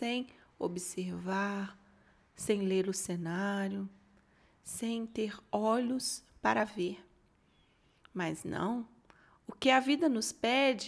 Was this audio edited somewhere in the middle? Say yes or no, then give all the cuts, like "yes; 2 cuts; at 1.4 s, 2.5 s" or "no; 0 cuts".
no; 0 cuts